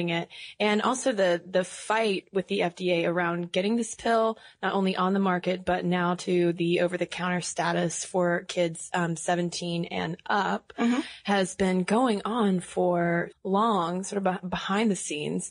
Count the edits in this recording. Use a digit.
1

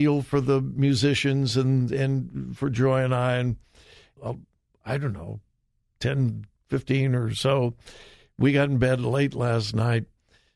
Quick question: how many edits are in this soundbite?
1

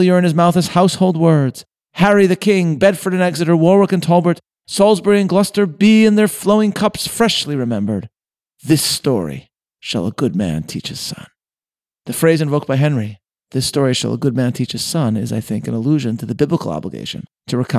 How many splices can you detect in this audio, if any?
0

